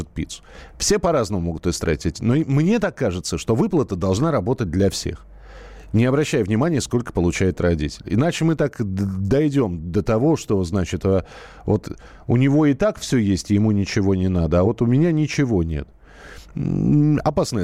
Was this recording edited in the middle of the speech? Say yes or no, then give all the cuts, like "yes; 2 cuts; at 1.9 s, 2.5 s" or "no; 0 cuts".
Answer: no; 0 cuts